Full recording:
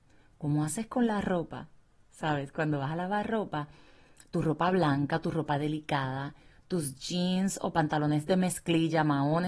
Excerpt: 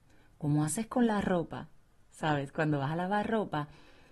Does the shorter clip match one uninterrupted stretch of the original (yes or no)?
yes